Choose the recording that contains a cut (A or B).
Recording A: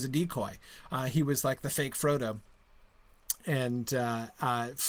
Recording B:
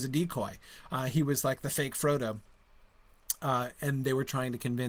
A